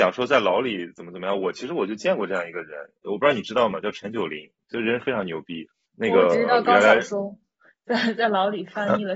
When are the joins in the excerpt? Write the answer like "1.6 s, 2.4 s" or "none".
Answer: none